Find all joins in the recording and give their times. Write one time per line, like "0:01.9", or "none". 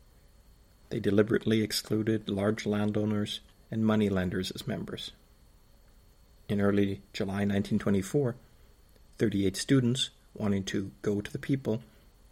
0:03.5